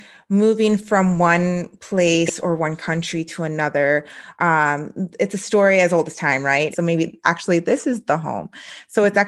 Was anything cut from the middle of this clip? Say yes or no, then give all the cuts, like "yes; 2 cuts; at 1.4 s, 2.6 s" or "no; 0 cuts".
yes; 1 cut; at 6.7 s